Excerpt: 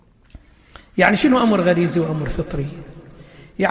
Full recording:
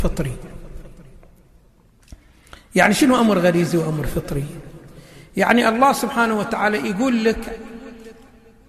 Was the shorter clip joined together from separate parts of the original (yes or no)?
no